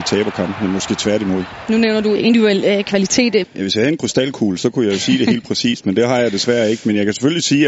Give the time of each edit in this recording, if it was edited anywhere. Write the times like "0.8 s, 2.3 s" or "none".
2.2 s, 3.4 s